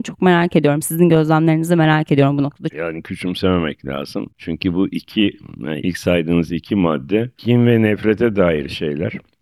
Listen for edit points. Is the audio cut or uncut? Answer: cut